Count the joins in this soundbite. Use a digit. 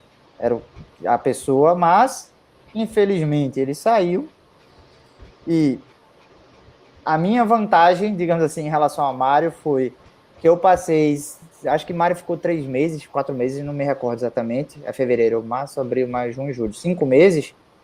0